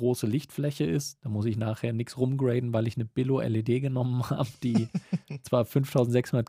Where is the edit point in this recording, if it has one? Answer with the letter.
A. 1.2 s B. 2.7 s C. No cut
A